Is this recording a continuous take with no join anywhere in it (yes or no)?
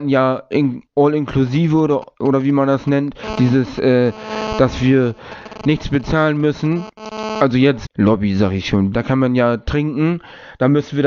no